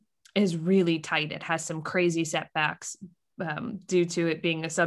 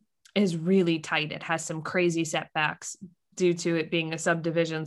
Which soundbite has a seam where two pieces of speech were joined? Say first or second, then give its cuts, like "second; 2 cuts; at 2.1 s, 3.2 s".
second; 1 cut; at 3.3 s